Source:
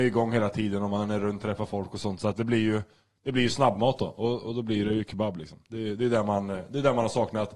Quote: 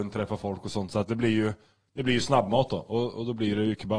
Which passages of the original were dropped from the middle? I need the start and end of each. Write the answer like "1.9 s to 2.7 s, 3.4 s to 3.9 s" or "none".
none